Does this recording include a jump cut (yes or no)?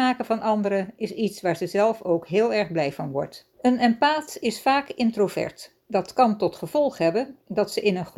yes